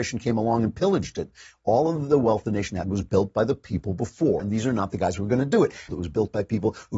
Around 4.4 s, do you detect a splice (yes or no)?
yes